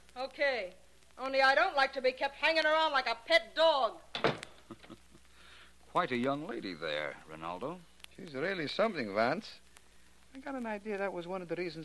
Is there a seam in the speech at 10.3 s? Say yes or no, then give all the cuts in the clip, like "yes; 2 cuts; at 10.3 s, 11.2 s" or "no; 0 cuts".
yes; 2 cuts; at 8.1 s, 10.3 s